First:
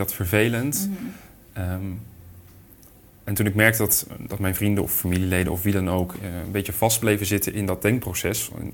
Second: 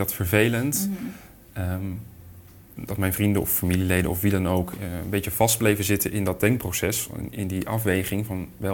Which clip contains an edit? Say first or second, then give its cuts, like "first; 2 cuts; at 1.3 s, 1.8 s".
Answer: second; 1 cut; at 2.8 s